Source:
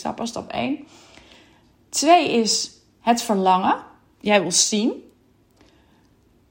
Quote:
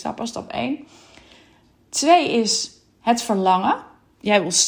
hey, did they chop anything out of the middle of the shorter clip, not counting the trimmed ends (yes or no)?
no